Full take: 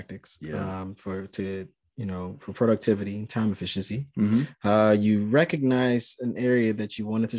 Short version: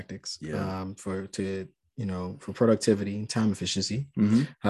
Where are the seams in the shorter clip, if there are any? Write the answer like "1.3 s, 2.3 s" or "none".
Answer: none